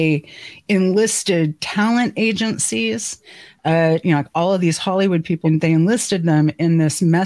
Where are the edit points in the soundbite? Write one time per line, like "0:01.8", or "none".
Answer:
0:04.0
0:05.4